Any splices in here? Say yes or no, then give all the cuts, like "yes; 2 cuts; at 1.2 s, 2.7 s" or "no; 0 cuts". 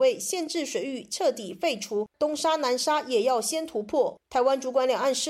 no; 0 cuts